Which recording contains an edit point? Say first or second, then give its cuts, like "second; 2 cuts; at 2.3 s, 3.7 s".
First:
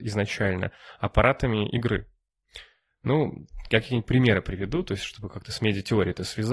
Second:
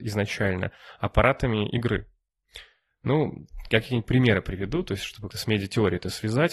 second; 1 cut; at 5.3 s